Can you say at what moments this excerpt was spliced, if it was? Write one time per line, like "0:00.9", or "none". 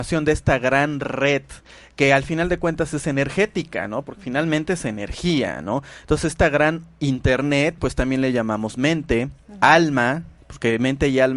0:07.8